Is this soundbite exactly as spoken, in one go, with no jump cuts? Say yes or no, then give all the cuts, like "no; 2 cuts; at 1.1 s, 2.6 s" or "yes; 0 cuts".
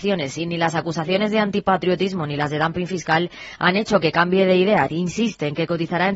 no; 1 cut; at 4.9 s